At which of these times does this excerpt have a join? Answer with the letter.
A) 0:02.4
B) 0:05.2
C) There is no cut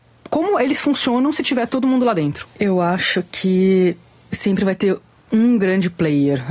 A